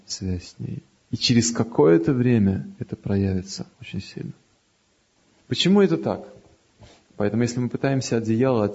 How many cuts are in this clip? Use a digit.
1